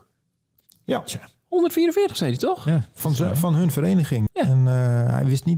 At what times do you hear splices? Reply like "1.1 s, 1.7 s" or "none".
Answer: 4.3 s